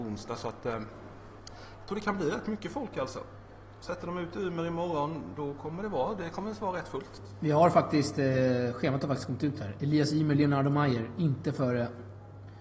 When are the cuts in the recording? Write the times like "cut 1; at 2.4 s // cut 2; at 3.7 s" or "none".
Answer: none